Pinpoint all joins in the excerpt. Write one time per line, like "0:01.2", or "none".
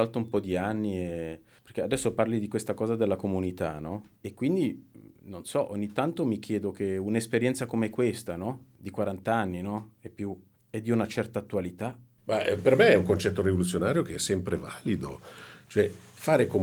0:04.1